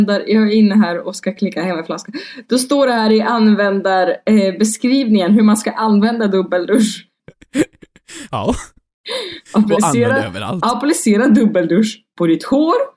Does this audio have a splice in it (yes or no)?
yes